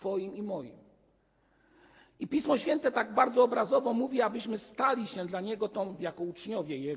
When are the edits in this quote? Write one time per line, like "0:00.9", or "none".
none